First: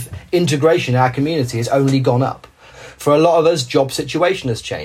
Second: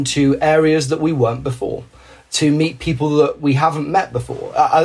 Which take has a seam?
first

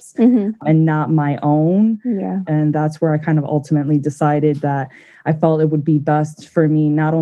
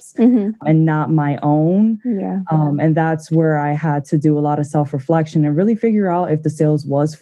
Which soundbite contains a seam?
first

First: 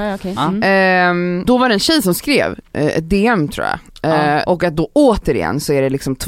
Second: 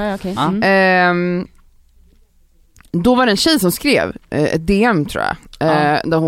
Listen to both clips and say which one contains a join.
first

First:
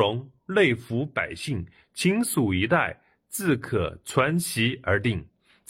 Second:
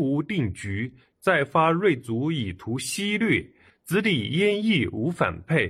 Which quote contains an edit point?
second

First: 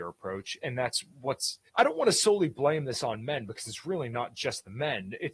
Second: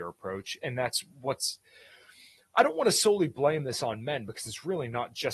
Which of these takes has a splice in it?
first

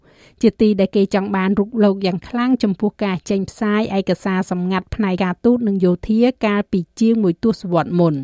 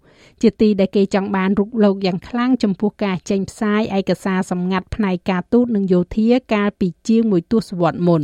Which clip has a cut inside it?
first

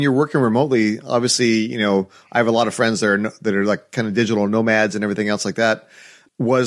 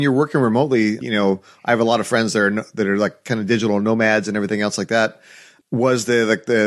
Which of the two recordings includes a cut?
second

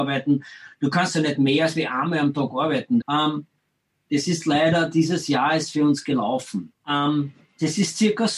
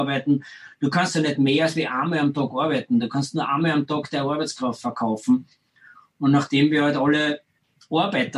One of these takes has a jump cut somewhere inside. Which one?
first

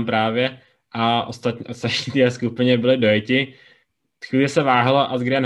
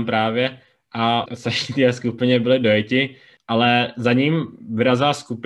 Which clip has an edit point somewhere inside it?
second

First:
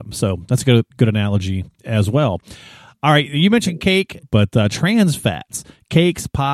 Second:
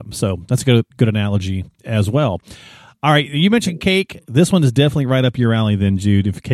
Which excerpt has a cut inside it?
first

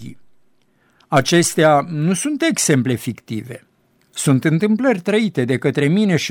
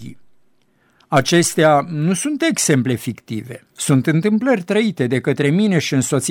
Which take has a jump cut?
second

